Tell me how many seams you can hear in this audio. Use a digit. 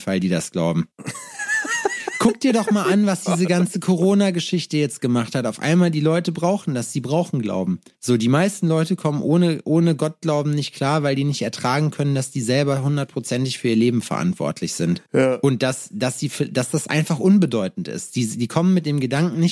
0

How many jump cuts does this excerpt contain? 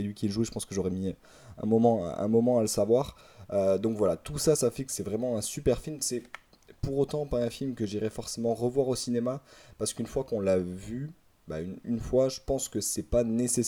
0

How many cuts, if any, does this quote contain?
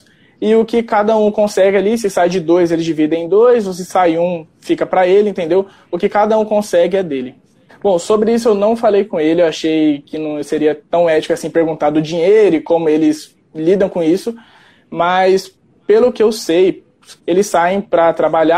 2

